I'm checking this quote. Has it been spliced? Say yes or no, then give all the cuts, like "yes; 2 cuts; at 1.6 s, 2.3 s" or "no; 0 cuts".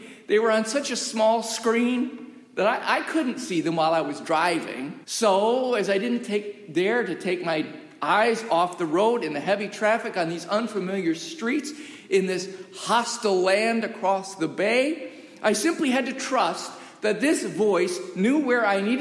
yes; 1 cut; at 5.0 s